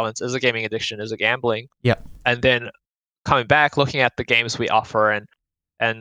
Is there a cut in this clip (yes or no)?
no